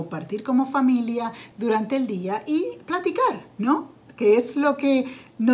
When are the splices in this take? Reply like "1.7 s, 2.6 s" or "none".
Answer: 1.5 s